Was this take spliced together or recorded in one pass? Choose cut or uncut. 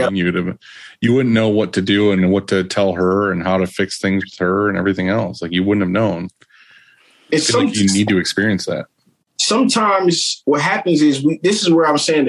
uncut